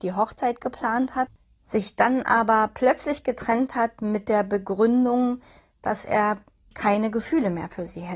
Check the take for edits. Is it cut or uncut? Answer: uncut